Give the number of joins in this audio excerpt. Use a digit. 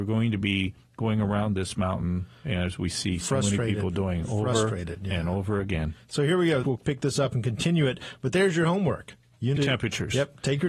2